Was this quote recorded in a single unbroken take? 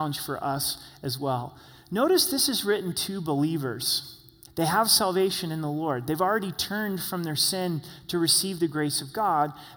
no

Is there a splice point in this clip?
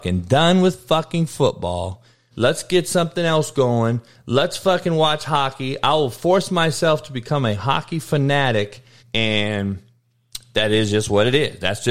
yes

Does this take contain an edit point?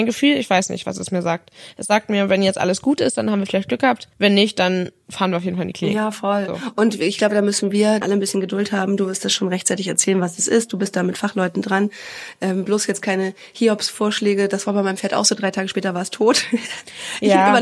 yes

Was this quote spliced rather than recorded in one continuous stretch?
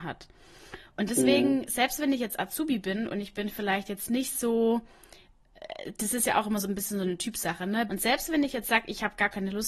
yes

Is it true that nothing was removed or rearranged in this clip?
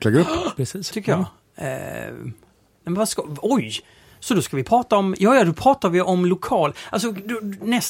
no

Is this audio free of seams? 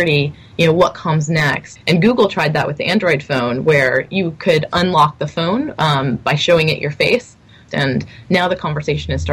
no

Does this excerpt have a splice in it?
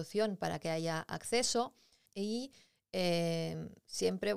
yes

